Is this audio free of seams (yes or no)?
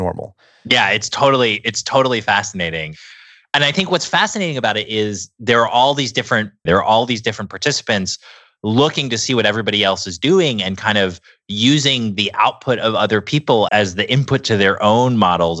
no